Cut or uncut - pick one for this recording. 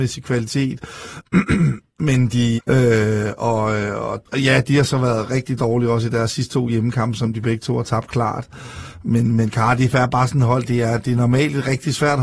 cut